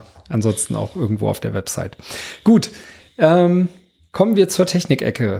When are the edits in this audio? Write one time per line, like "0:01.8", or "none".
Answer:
none